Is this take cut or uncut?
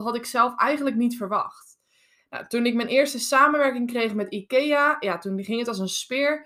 uncut